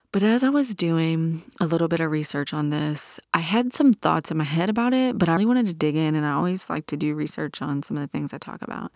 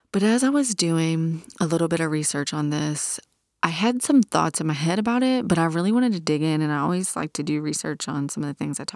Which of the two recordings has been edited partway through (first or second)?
first